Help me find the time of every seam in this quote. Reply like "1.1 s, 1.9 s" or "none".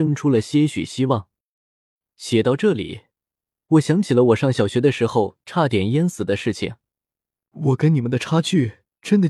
7.4 s